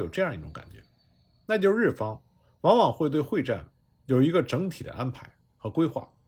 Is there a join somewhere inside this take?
no; 0 cuts

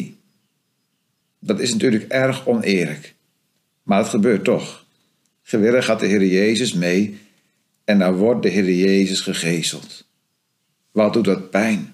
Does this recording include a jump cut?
yes; 1 cut; at 1.2 s

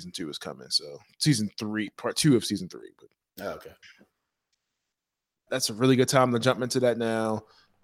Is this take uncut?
no; 2 cuts; at 1.9 s, 5.5 s

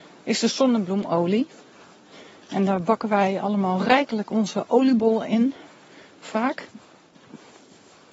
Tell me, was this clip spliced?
no; 0 cuts

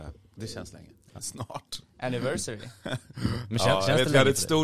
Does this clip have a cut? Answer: yes; 1 cut; at 1.2 s

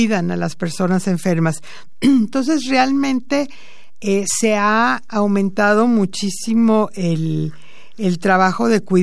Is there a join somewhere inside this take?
no; 0 cuts

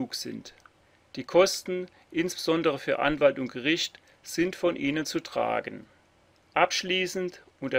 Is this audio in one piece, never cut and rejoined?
yes; 0 cuts

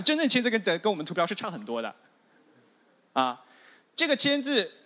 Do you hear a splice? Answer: no; 0 cuts

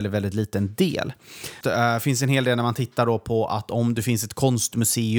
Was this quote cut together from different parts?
yes; 1 cut; at 1.6 s

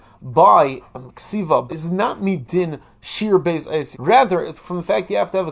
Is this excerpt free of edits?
no; 2 cuts; at 1.7 s, 3.9 s

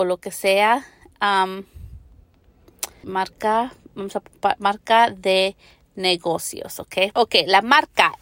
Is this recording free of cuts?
no; 2 cuts; at 3.0 s, 7.1 s

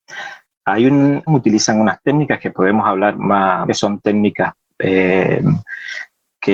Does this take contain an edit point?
yes; 2 cuts; at 1.3 s, 3.7 s

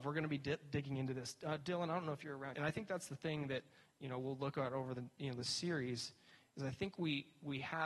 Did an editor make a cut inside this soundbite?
yes; 1 cut; at 2.5 s

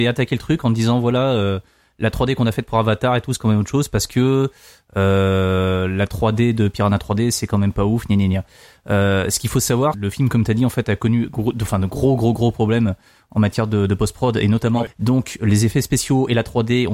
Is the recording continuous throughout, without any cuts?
no; 2 cuts; at 9.9 s, 14.9 s

